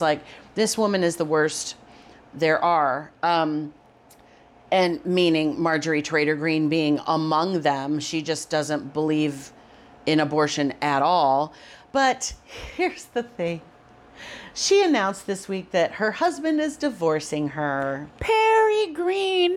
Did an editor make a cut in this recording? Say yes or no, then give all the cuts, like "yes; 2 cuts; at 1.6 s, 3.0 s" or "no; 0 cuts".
no; 0 cuts